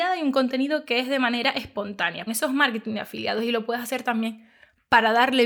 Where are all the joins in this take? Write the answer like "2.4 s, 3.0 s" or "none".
2.3 s